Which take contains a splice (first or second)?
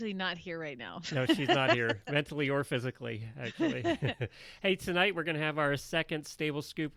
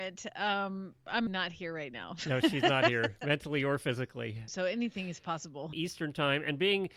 second